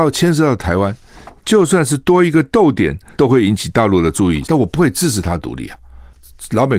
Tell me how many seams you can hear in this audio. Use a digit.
2